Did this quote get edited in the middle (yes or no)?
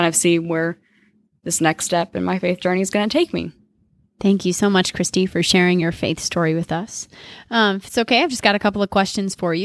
no